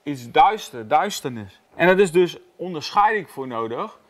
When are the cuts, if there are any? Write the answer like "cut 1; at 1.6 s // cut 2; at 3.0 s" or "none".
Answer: cut 1; at 1.7 s

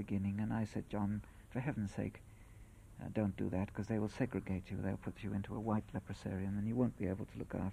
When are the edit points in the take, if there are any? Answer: none

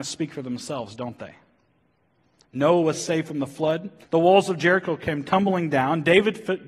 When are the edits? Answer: cut 1; at 4.0 s

